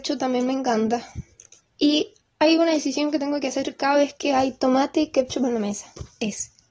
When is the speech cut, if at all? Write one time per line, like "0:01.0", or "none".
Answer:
0:01.6